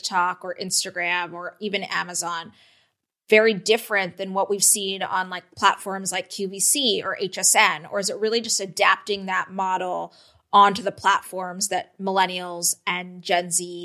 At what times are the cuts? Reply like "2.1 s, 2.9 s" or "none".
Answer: none